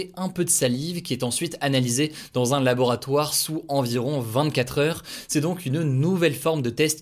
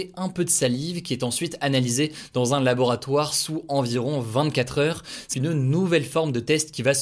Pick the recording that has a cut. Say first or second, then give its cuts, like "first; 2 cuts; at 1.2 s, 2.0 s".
second; 1 cut; at 5.3 s